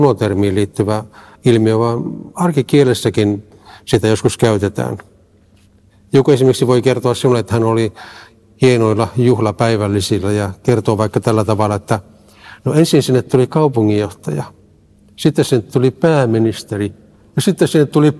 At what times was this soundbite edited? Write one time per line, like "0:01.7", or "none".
none